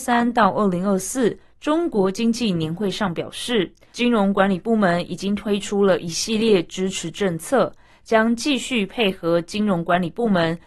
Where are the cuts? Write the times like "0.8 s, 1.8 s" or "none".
3.9 s, 8.0 s